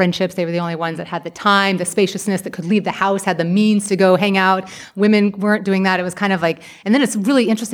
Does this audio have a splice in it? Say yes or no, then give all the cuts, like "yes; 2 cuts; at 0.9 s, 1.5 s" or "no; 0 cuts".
no; 0 cuts